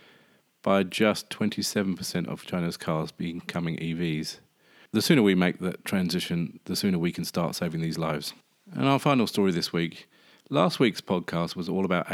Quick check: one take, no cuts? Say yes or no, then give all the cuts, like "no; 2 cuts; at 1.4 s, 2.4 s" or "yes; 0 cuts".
yes; 0 cuts